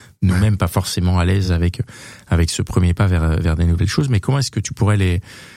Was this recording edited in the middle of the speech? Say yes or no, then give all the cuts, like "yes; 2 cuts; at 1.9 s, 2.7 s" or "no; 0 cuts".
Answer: no; 0 cuts